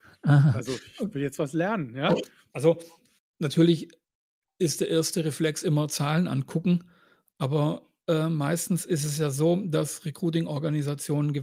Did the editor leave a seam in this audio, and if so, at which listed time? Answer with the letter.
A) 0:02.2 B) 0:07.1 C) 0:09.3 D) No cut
A